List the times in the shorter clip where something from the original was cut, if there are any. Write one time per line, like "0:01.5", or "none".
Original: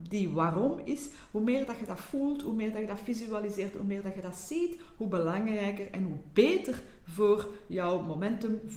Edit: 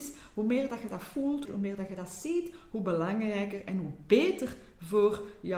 0:01.4